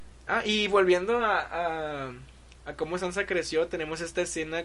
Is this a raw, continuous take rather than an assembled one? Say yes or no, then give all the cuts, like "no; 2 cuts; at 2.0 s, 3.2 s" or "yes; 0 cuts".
yes; 0 cuts